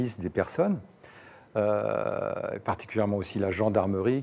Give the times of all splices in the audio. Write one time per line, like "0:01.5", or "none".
none